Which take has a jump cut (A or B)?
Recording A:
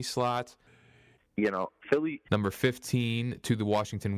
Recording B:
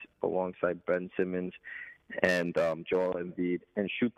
A